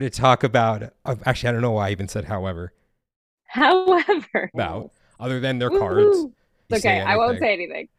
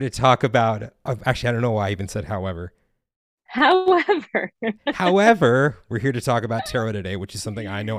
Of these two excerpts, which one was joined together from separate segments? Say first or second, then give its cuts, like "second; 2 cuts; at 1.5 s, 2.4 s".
first; 2 cuts; at 4.5 s, 6.7 s